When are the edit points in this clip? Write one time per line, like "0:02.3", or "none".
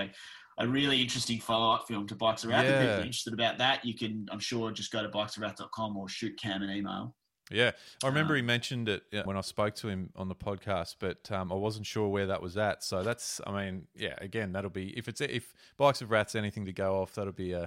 0:09.3